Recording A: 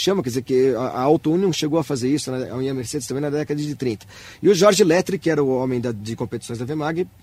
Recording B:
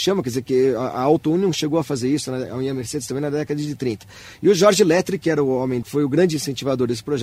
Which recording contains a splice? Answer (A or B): B